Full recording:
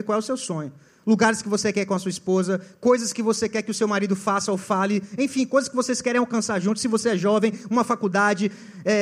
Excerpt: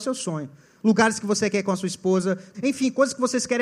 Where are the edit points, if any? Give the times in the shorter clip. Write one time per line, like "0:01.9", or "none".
0:02.5